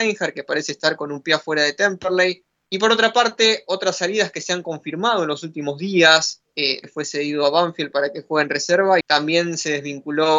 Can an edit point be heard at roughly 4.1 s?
no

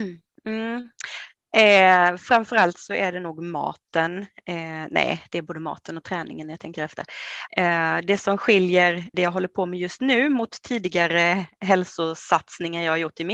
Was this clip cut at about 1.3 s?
no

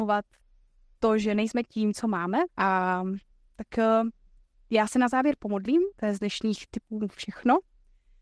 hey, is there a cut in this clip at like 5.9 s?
yes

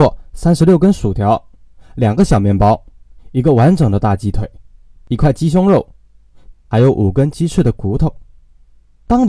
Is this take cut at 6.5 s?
yes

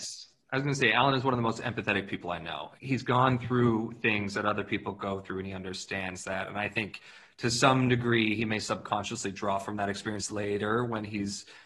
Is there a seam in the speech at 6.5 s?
no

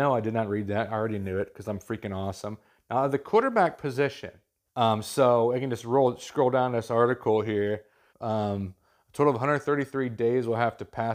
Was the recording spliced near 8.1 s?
yes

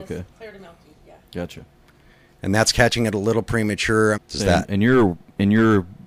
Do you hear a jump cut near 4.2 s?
yes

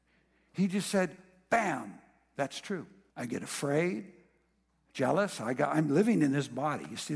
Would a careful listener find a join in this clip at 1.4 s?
no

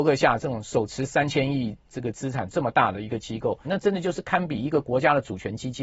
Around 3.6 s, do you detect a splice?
yes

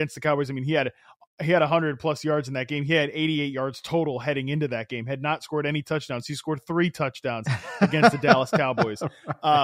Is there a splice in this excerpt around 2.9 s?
no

